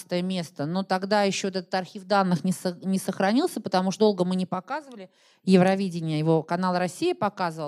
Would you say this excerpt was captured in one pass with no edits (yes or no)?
no